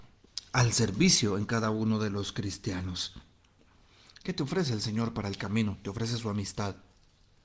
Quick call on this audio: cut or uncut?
cut